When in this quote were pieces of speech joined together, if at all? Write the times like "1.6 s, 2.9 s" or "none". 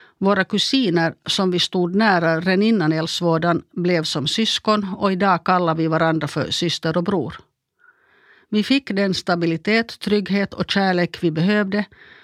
none

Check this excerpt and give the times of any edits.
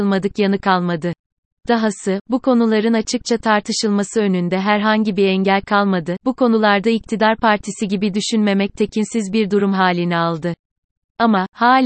1.5 s, 6.2 s

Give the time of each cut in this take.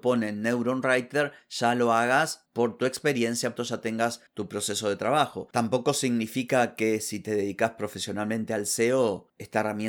3.6 s

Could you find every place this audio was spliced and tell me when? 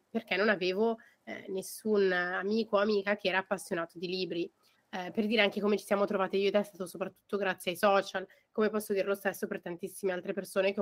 4.7 s

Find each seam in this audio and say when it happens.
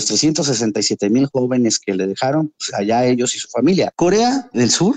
3.9 s

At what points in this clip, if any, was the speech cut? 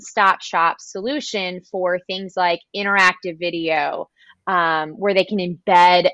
none

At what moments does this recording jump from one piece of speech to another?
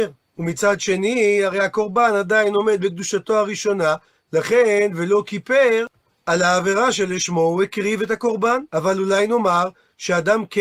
8.7 s

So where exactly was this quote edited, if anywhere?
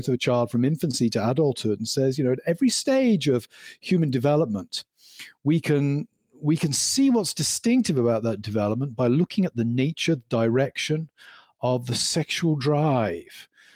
none

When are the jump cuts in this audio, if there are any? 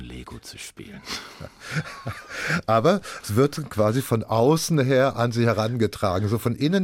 none

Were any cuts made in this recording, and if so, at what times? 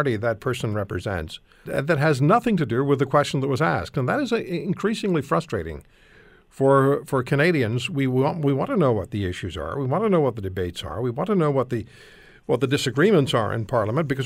1.7 s

